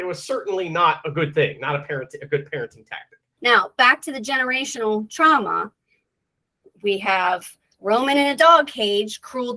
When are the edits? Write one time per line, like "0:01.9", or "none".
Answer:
none